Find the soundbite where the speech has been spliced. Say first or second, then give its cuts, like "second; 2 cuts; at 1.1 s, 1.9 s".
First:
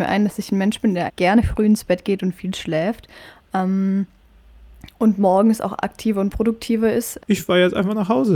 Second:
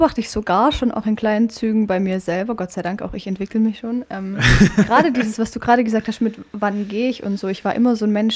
first; 2 cuts; at 1.1 s, 7.2 s